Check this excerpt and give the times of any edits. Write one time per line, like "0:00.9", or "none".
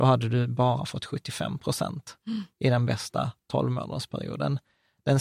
none